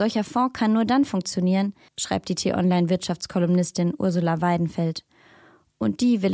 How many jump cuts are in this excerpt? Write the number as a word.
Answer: one